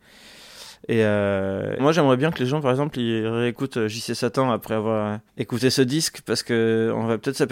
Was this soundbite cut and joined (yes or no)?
yes